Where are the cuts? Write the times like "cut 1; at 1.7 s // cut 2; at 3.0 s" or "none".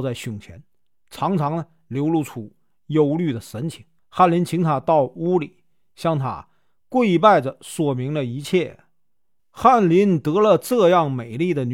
cut 1; at 4.0 s // cut 2; at 9.4 s

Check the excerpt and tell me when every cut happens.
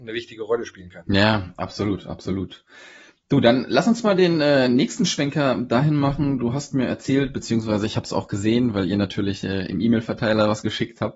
none

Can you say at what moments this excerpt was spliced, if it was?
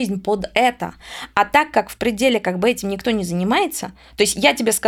none

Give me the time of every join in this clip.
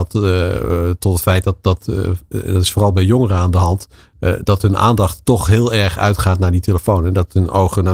cut 1; at 1.9 s

